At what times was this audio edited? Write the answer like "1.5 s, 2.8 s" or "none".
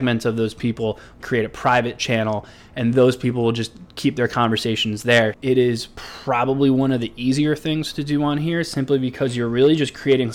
1.2 s, 5.3 s